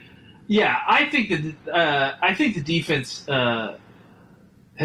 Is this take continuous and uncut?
yes; 0 cuts

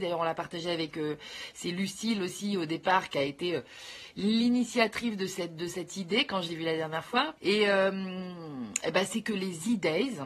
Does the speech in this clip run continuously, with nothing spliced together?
no; 1 cut; at 7.4 s

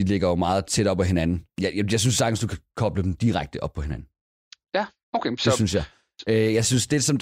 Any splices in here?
no; 0 cuts

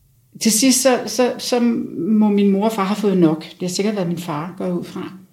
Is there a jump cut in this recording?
no; 0 cuts

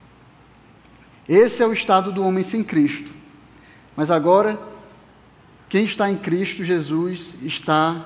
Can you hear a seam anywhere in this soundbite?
no; 0 cuts

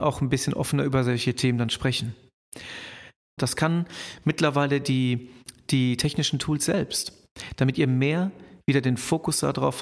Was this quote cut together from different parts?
yes; 1 cut; at 3.4 s

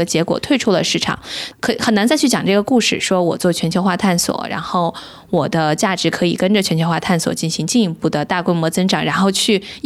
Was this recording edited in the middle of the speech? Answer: yes; 1 cut; at 1.5 s

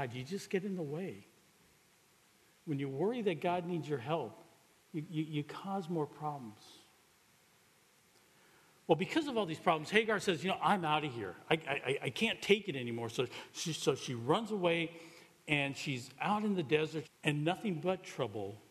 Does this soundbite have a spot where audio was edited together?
yes; 1 cut; at 17.0 s

